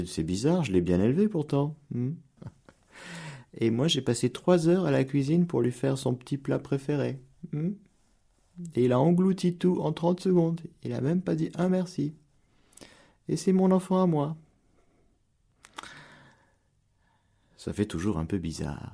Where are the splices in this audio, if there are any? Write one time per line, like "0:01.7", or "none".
0:02.4